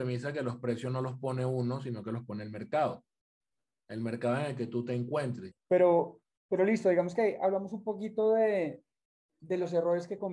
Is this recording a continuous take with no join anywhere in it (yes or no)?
no